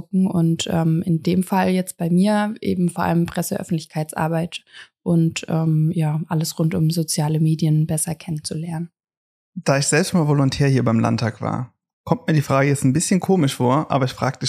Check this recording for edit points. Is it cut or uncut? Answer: uncut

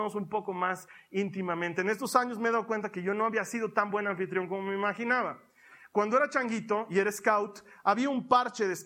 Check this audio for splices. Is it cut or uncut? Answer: uncut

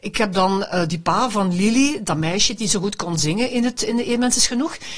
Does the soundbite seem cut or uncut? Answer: uncut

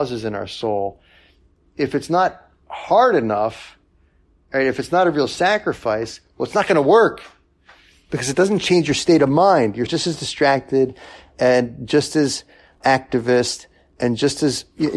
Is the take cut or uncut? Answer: cut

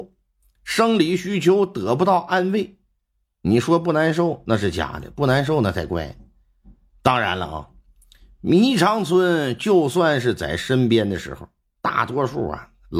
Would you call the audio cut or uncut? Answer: uncut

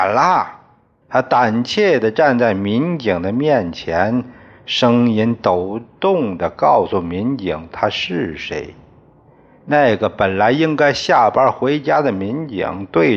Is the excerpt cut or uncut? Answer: cut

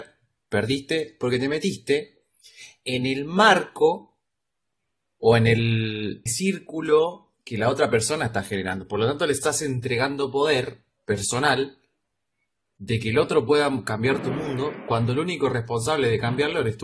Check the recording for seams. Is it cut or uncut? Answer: cut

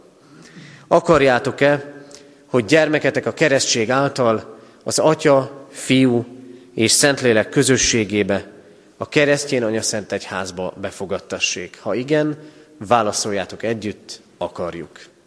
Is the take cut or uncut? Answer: uncut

